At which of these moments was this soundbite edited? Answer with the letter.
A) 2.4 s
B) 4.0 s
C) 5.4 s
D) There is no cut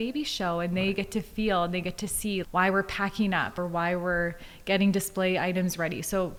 A